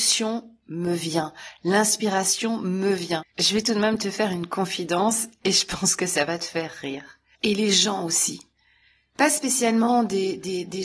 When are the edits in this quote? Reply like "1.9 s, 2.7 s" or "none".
3.3 s, 7.4 s